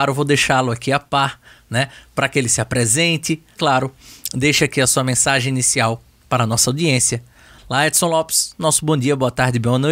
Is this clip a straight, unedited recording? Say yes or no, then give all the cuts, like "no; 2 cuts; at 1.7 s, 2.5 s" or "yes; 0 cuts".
no; 1 cut; at 3.6 s